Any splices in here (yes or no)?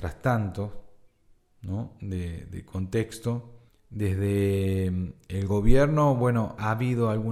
yes